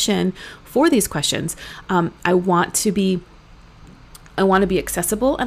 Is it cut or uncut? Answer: uncut